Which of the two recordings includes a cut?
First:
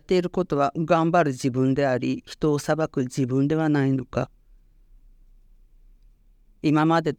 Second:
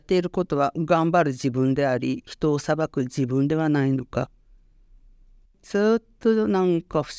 second; 1 cut; at 5.4 s

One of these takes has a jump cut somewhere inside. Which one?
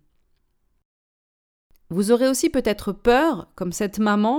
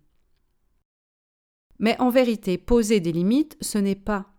second; 1 cut; at 1.7 s

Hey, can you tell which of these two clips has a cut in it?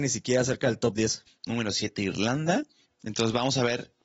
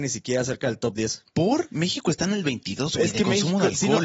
first; 2 cuts; at 1.3 s, 2.9 s

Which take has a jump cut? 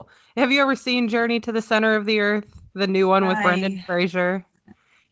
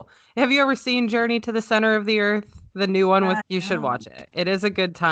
second; 1 cut; at 3.4 s

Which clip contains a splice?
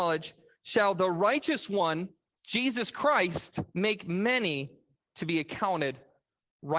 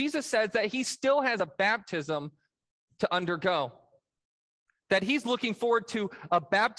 first; 2 cuts; at 2.4 s, 3.7 s

